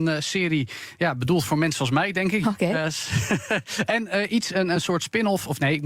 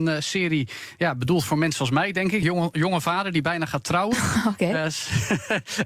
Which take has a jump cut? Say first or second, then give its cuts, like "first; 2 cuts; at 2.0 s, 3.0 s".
first; 1 cut; at 2.4 s